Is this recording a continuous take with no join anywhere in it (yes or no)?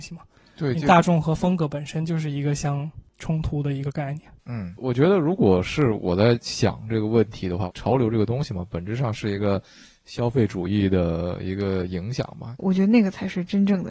no